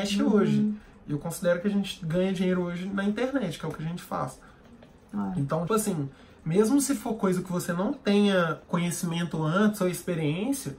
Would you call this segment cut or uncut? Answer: cut